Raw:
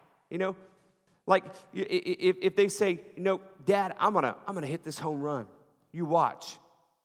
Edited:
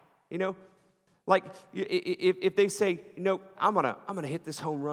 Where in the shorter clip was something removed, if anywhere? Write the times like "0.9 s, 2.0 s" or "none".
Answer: 3.5 s

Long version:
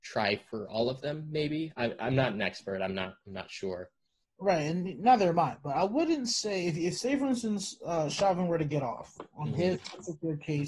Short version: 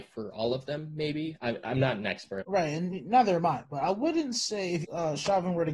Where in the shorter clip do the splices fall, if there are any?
2.4 s, 4.8 s

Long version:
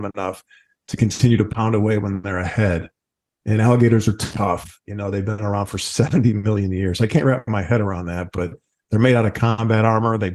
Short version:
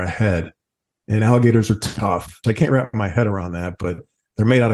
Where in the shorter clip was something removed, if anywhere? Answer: 2.4 s

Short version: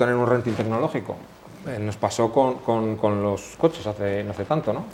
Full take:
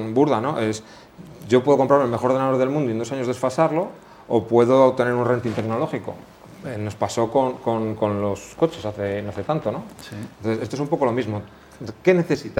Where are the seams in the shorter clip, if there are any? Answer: none

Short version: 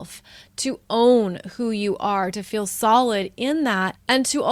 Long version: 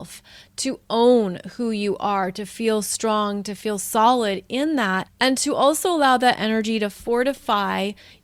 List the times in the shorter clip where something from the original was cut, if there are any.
2.3 s

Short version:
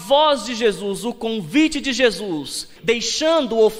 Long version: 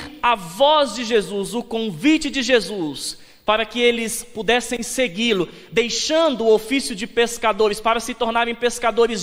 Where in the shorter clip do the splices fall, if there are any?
2.8 s

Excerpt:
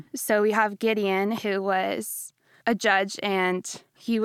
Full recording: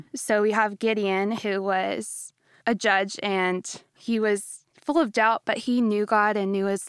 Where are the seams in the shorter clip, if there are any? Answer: none

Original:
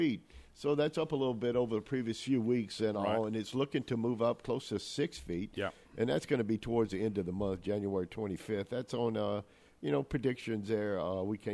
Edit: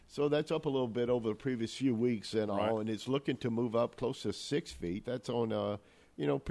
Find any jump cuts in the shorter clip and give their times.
5.0 s

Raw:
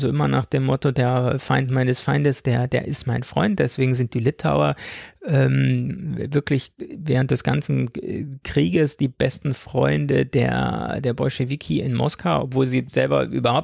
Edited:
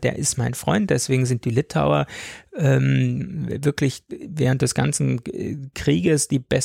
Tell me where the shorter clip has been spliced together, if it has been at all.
none

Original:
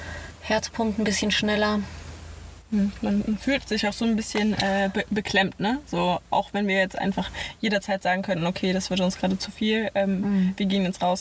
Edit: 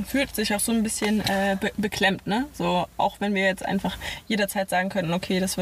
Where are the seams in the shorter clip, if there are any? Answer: none

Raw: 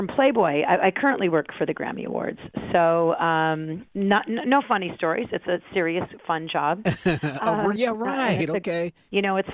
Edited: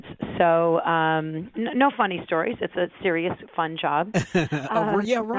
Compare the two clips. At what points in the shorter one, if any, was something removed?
1.5 s

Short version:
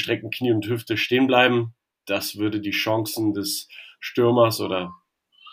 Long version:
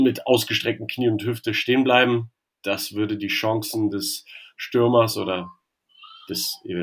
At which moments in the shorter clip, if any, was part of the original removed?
none

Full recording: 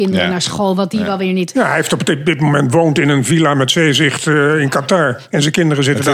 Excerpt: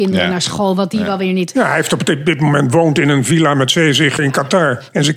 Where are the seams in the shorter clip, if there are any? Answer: 4.2 s

